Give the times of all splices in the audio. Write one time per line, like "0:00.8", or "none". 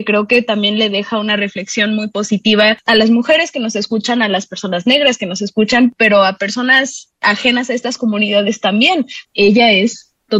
0:09.3